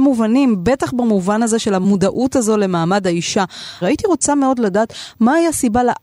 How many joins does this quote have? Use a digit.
1